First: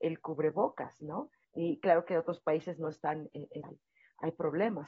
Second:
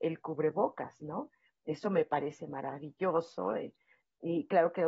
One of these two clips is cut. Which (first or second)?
first